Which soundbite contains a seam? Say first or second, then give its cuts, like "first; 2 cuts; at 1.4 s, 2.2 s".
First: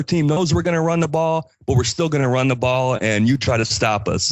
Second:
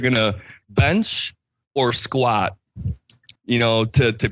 second; 1 cut; at 3.4 s